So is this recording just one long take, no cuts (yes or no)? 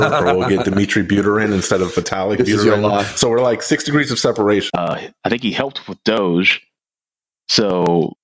no